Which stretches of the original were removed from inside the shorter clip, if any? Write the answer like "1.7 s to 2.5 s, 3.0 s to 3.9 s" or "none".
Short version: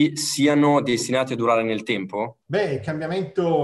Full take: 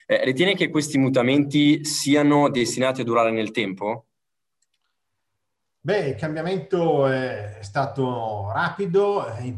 4.1 s to 5.8 s